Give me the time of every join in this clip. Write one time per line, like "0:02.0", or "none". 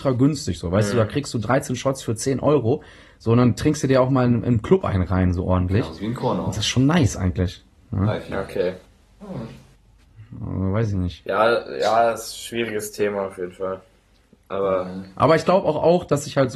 none

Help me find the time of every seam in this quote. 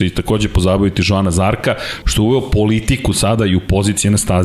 0:02.0

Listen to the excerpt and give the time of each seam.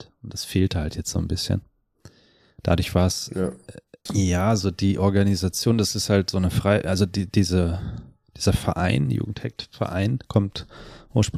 0:04.1

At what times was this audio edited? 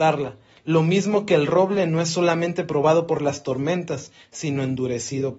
none

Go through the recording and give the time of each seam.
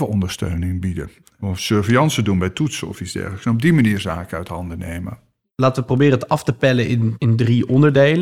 none

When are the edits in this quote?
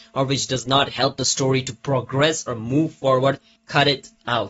0:03.6

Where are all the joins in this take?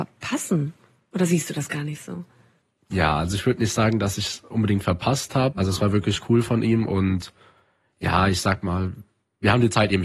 0:05.5

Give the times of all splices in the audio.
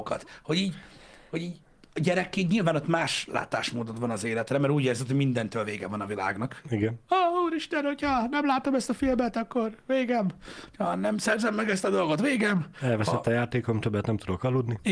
none

